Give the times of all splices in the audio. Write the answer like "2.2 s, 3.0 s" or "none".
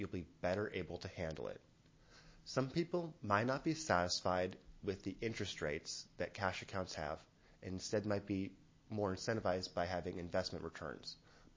none